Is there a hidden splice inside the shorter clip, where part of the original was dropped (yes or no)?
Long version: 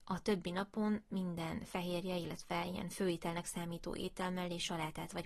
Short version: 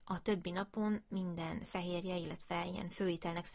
no